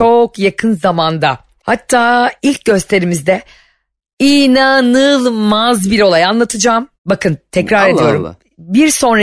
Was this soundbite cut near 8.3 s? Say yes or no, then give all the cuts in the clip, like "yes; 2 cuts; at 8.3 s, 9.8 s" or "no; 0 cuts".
no; 2 cuts; at 1.6 s, 6.9 s